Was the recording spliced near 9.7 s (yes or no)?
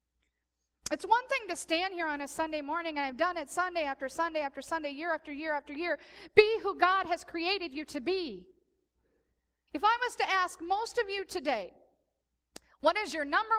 yes